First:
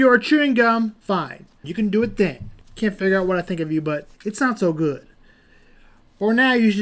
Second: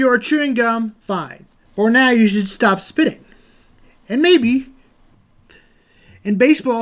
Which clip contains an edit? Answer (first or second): first